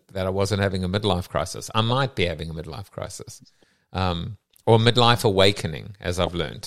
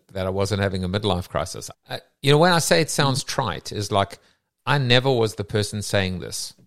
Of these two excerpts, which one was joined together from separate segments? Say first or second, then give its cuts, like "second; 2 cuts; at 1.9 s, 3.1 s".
second; 1 cut; at 1.7 s